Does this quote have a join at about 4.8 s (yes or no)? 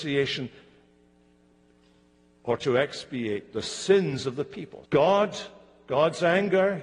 yes